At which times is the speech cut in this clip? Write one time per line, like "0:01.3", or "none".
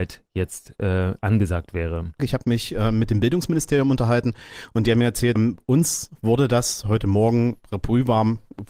0:02.2
0:05.4